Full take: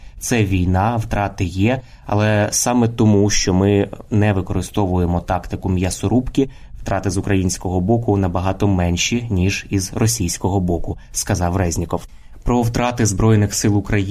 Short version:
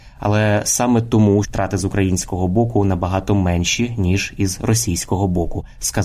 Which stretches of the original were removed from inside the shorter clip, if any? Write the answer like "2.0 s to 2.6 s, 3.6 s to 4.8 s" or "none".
3.3 s to 6.8 s